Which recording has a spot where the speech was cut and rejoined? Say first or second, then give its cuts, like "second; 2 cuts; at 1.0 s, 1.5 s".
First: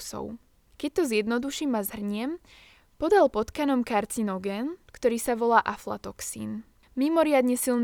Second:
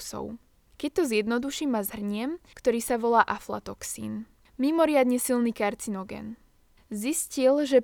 second; 1 cut; at 2.5 s